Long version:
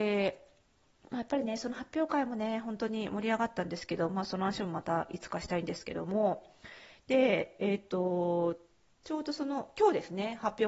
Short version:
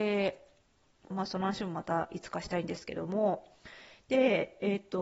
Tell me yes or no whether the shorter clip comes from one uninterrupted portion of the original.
no